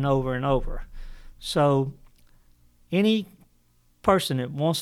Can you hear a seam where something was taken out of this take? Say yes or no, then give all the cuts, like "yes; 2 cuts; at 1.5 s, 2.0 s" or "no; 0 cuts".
no; 0 cuts